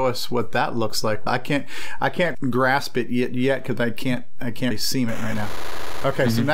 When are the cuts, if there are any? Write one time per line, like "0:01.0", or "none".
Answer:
0:01.3
0:02.3
0:04.7